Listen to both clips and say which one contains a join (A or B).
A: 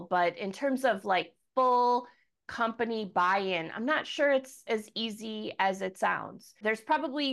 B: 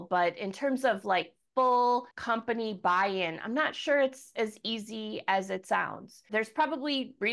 B